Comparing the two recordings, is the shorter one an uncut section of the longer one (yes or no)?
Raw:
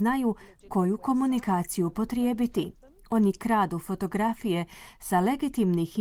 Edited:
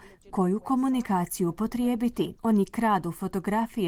no